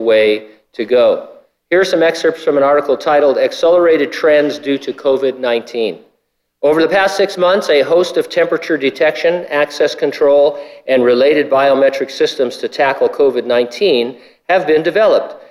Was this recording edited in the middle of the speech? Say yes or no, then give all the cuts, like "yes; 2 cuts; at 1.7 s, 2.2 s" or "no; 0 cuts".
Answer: no; 0 cuts